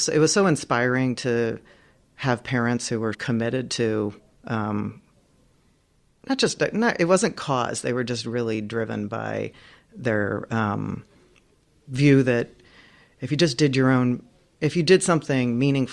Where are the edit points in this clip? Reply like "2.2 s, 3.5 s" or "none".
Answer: 3.1 s